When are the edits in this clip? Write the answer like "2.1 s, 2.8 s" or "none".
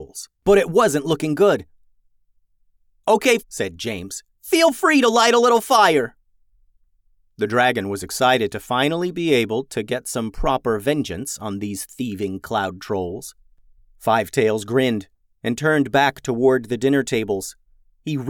3.4 s